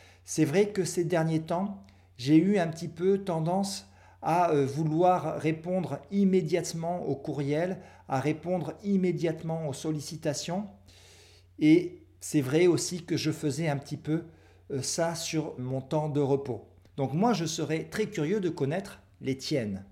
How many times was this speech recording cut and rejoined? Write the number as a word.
two